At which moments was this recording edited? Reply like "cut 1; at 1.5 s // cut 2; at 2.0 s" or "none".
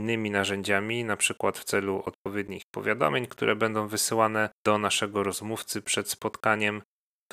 cut 1; at 4.6 s